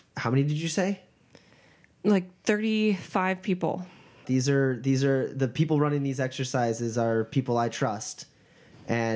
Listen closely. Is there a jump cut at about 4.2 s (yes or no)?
yes